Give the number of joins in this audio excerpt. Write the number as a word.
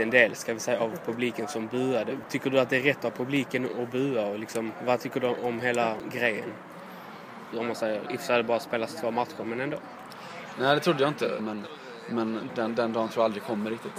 three